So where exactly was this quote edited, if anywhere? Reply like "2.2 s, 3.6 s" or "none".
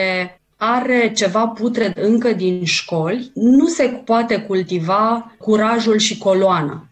none